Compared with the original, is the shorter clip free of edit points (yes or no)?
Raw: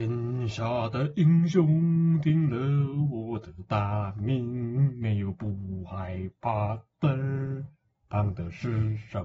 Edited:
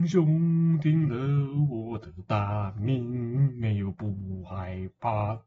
yes